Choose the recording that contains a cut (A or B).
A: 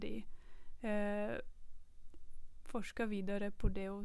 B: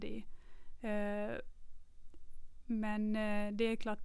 A